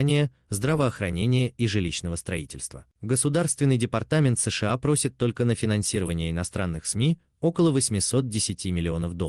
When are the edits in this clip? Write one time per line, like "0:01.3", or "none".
0:02.9